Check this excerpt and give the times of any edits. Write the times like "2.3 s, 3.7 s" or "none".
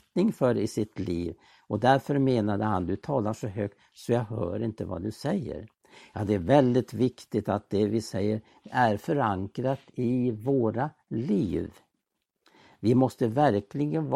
none